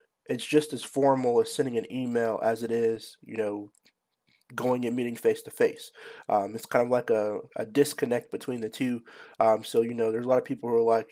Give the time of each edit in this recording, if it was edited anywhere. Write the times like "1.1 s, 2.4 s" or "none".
7.5 s